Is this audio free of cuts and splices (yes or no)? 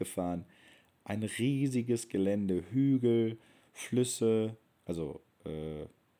yes